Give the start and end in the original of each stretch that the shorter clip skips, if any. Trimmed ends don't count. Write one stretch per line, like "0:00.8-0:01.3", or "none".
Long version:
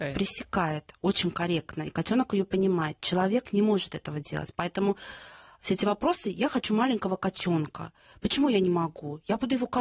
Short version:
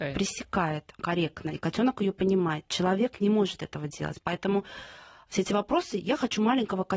0:01.0-0:01.3